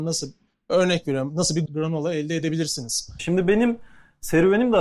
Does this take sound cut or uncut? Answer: cut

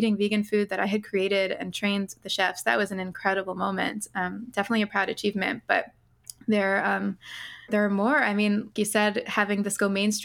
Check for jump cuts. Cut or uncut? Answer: cut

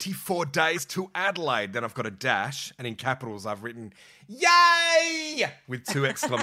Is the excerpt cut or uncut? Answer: uncut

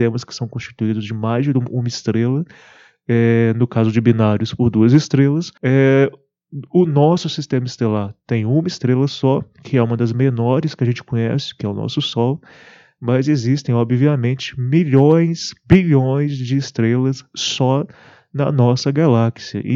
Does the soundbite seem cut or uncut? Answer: cut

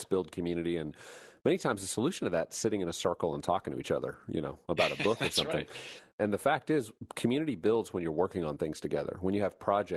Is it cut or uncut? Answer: uncut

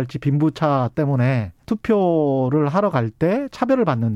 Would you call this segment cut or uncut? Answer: cut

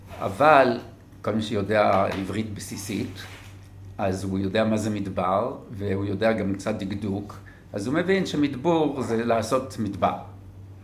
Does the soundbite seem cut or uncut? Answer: uncut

